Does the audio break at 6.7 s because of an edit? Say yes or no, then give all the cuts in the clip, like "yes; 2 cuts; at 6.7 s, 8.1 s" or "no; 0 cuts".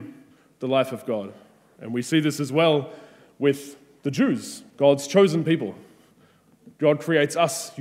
yes; 3 cuts; at 1.7 s, 4.7 s, 6.7 s